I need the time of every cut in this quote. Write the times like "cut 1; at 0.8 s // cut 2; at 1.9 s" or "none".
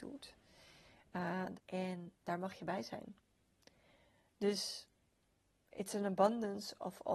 cut 1; at 1.5 s